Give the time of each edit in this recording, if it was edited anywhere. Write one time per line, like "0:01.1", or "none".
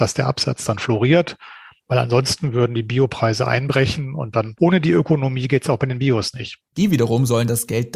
0:04.6
0:06.7